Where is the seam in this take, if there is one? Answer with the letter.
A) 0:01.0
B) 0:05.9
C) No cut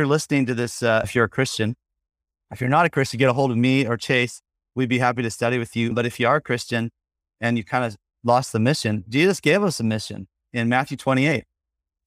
A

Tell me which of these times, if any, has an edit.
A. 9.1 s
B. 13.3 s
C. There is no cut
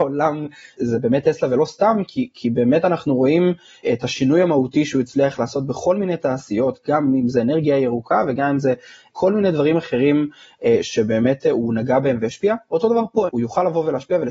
B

